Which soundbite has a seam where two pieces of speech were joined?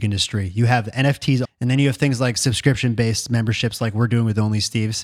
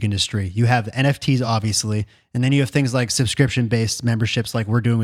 first; 1 cut; at 1.4 s

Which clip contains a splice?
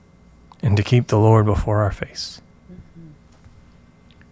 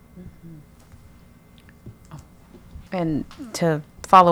second; 1 cut; at 2.9 s

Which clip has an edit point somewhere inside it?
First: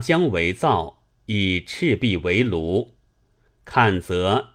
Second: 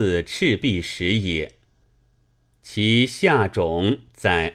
first; 1 cut; at 3.5 s

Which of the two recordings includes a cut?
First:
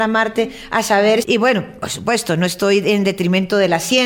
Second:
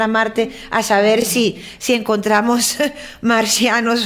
first; 1 cut; at 1.2 s

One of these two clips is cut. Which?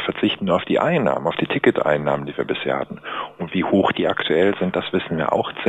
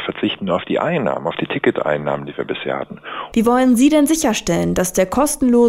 second; 1 cut; at 3.3 s

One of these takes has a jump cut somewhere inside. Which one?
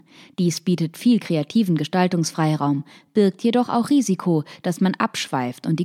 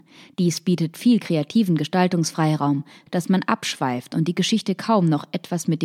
second; 1 cut; at 3.1 s

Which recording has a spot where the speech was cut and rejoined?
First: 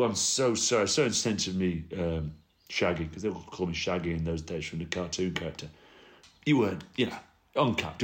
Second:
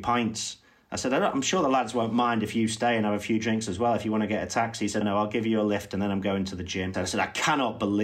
second; 2 cuts; at 5.0 s, 6.9 s

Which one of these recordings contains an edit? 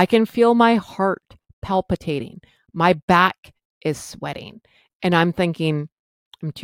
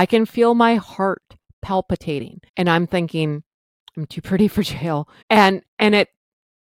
second; 2 cuts; at 2.5 s, 5.2 s

